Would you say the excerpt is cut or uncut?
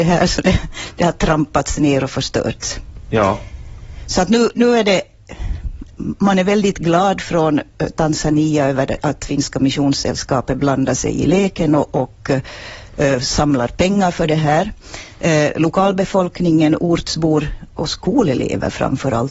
uncut